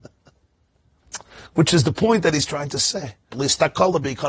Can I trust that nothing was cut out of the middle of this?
no; 1 cut; at 3.3 s

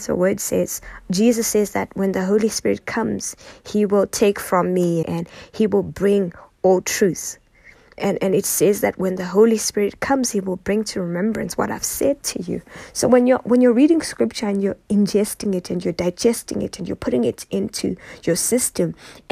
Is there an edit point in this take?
yes; 2 cuts; at 5.0 s, 8.0 s

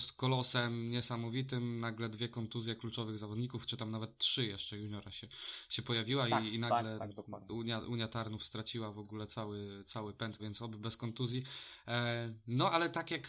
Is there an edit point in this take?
yes; 1 cut; at 10.4 s

